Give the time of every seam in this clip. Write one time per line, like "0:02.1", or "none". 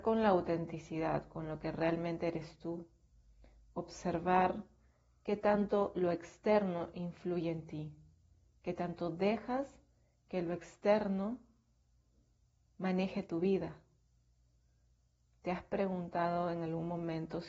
none